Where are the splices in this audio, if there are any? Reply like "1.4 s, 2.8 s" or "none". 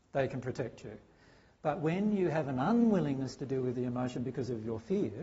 none

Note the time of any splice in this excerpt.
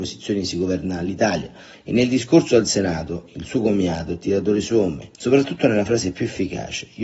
1.7 s, 5.2 s

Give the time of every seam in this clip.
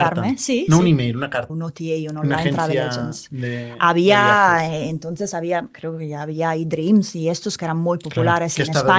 1.5 s

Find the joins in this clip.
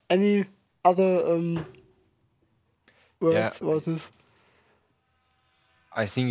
none

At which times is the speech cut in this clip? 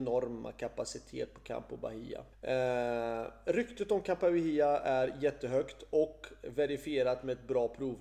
2.3 s

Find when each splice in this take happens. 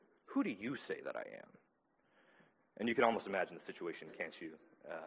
none

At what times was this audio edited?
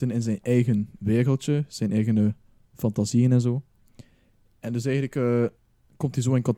none

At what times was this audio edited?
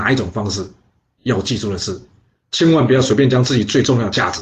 none

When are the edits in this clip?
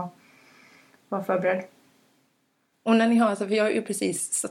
2.7 s

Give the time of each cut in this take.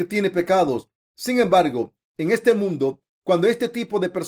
none

